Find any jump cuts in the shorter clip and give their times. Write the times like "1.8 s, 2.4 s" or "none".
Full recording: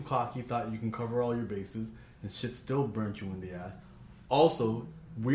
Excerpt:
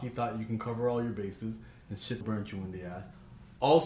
2.2 s